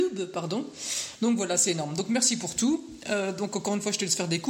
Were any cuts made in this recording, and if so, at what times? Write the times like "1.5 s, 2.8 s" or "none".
none